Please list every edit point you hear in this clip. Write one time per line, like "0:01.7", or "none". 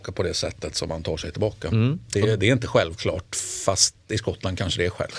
none